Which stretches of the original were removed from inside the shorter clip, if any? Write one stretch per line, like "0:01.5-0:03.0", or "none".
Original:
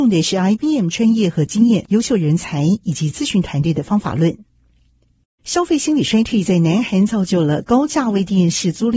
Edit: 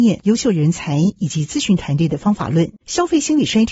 0:04.4-0:05.3